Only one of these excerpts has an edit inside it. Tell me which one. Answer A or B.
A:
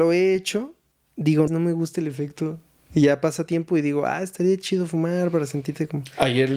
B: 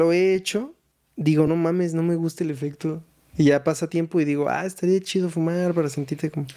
A